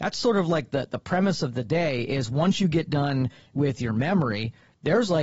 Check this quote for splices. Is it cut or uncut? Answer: uncut